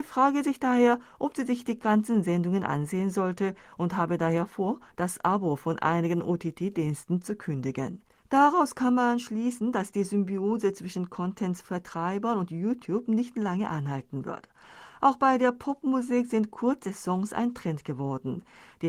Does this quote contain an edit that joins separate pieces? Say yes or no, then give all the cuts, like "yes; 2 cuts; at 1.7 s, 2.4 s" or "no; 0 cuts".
no; 0 cuts